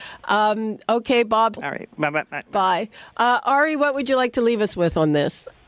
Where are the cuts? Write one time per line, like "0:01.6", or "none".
0:01.6